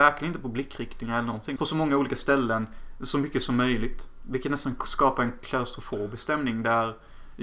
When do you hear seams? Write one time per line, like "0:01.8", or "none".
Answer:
0:01.6